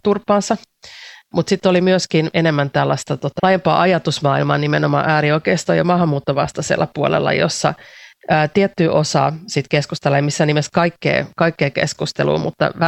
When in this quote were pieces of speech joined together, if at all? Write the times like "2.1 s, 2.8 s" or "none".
3.4 s

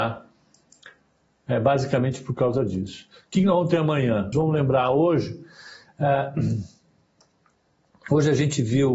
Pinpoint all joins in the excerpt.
4.3 s

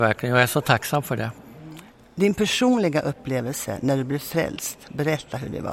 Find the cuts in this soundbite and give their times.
none

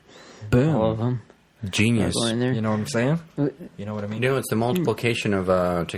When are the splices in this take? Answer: 3.7 s

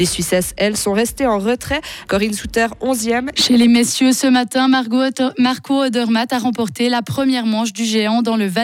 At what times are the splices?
2.1 s, 3.3 s

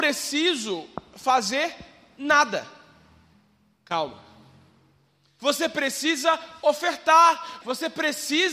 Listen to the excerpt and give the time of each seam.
5.4 s, 7.6 s

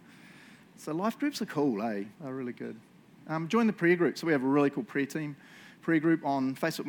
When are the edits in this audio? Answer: 2.1 s

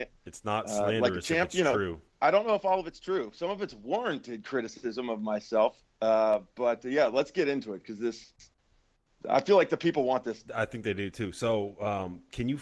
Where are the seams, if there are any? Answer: none

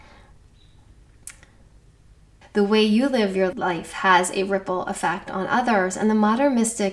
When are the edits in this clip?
2.4 s

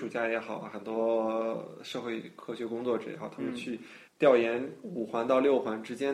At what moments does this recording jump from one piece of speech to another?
4.1 s

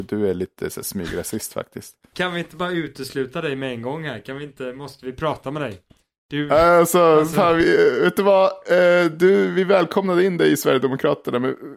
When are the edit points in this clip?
none

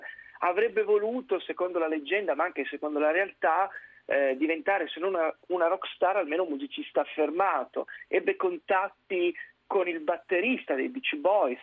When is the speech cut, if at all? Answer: none

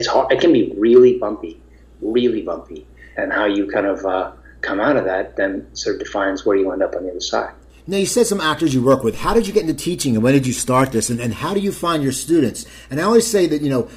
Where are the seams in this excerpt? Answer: 3.2 s

